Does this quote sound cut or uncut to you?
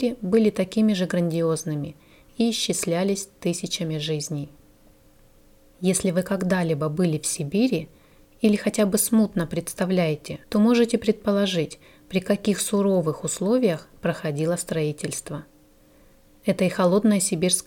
cut